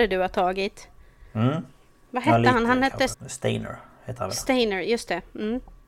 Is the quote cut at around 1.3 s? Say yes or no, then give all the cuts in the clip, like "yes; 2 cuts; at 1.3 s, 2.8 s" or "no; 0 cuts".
no; 1 cut; at 3.1 s